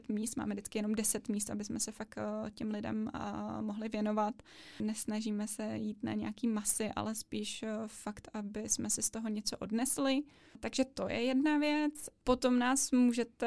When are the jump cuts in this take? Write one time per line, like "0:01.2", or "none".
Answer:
none